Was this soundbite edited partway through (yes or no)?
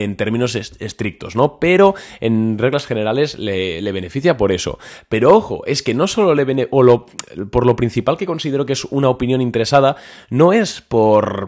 no